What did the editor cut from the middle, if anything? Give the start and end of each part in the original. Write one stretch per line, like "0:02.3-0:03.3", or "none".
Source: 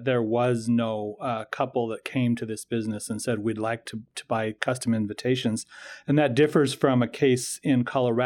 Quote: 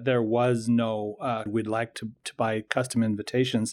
0:01.5-0:03.4